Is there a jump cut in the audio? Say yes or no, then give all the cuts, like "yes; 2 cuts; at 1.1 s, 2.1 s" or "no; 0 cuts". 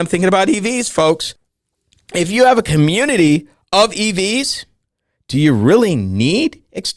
no; 0 cuts